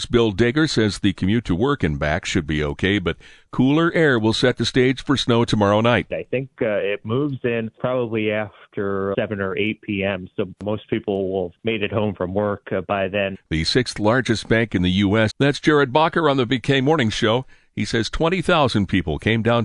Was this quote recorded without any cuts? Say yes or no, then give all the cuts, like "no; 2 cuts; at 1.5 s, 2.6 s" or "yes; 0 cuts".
no; 3 cuts; at 9.1 s, 13.3 s, 15.3 s